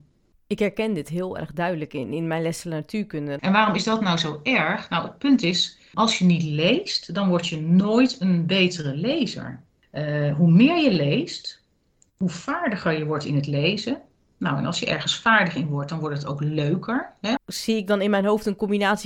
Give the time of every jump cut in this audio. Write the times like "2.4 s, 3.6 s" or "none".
3.4 s, 5.9 s, 17.4 s